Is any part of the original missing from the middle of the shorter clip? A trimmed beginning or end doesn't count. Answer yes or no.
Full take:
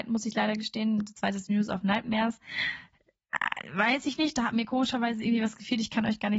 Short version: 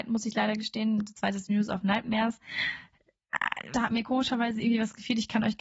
yes